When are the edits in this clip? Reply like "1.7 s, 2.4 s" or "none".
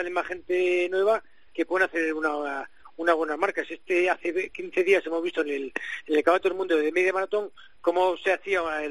none